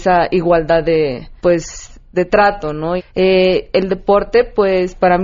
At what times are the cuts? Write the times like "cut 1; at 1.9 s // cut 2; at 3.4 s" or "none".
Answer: cut 1; at 1.4 s // cut 2; at 3.0 s